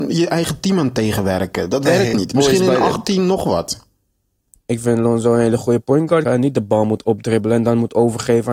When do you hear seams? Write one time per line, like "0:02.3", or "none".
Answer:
0:04.5
0:06.2